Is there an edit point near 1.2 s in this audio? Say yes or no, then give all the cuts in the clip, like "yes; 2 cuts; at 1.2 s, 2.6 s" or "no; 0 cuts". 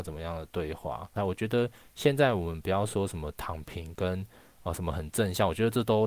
yes; 1 cut; at 1.2 s